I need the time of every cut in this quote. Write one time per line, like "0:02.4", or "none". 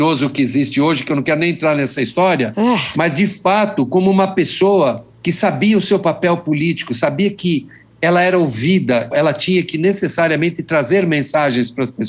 0:05.1
0:09.1